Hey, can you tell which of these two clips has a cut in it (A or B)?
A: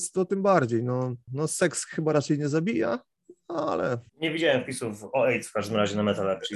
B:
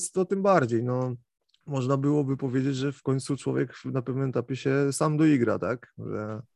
A